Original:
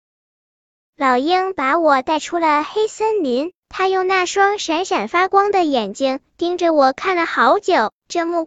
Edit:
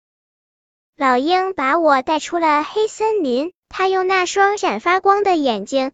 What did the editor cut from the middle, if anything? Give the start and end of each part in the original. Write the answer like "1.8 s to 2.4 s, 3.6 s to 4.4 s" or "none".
4.6 s to 4.9 s